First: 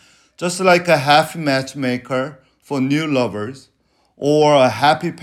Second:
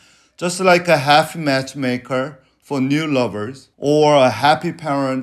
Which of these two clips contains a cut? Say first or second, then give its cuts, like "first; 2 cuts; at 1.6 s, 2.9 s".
second; 1 cut; at 3.7 s